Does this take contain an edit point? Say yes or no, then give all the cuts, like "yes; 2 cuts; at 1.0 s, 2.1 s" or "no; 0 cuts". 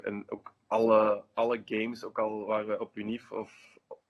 no; 0 cuts